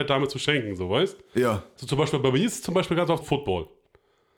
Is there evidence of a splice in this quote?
yes; 2 cuts; at 1.8 s, 3.2 s

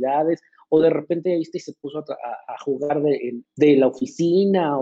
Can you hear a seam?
yes; 1 cut; at 3.4 s

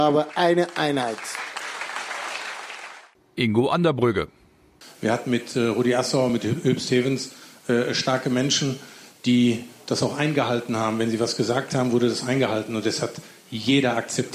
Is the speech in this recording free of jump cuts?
yes; 0 cuts

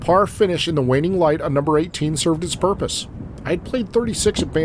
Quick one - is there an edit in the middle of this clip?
no; 0 cuts

